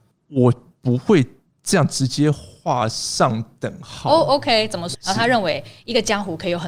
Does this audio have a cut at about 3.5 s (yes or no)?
no